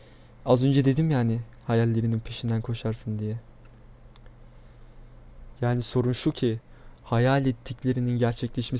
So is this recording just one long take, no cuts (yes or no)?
no